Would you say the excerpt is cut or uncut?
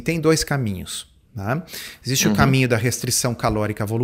uncut